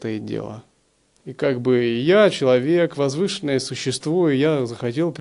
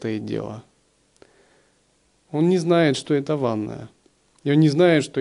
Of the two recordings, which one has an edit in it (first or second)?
first